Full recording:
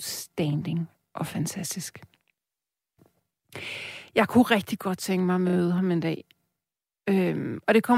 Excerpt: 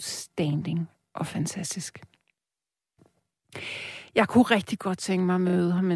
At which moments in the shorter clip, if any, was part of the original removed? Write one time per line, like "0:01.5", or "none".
none